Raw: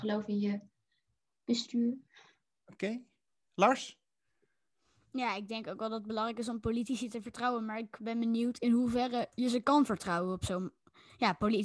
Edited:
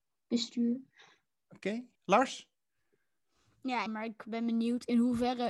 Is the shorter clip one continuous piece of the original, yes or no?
no